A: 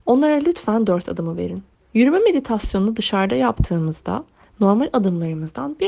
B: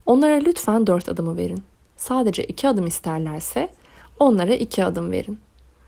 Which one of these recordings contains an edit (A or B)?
A